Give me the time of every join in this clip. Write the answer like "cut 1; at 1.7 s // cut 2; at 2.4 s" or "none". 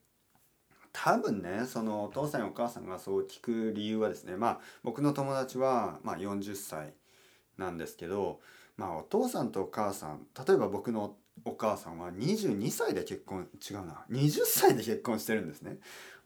none